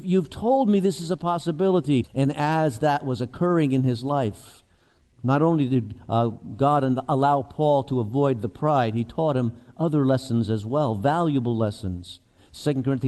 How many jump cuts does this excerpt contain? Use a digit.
1